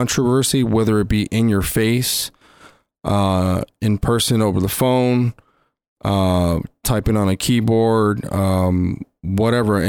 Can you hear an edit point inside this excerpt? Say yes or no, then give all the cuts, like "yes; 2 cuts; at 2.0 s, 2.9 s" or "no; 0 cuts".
no; 0 cuts